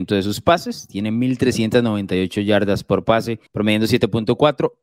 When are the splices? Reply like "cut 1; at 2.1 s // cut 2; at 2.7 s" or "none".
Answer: cut 1; at 3.5 s